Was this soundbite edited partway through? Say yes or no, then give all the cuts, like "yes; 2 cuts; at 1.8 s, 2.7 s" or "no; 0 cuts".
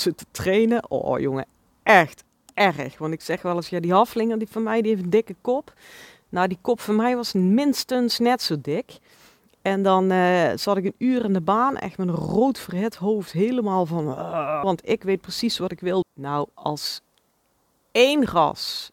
yes; 2 cuts; at 14.6 s, 16.0 s